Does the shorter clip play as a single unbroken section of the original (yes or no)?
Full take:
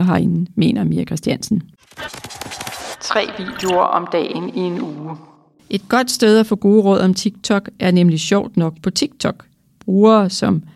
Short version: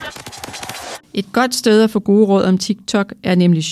no